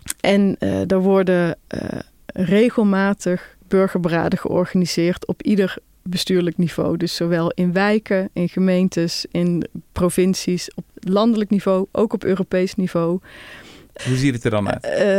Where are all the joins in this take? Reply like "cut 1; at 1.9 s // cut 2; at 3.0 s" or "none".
cut 1; at 14.0 s